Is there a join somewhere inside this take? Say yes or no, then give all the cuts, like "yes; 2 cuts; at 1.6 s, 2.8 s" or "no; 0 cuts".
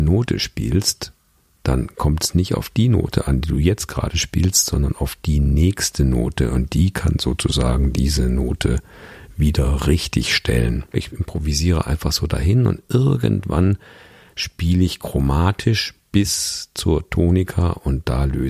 yes; 1 cut; at 10.9 s